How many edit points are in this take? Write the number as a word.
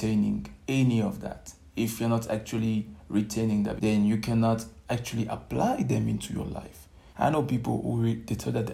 two